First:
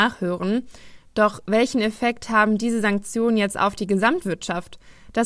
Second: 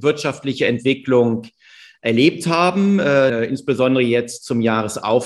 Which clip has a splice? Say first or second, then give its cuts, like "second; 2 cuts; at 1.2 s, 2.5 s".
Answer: second; 1 cut; at 3.3 s